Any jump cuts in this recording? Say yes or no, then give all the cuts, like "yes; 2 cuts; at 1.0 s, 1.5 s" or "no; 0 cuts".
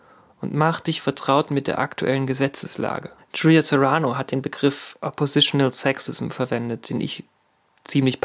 yes; 1 cut; at 3.2 s